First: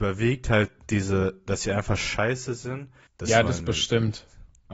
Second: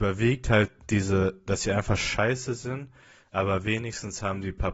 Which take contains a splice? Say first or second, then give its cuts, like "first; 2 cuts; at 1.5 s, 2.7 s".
first; 1 cut; at 3.1 s